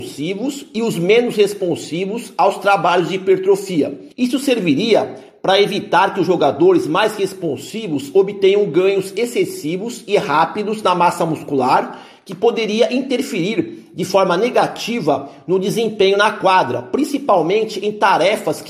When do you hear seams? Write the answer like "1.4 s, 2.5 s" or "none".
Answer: 4.1 s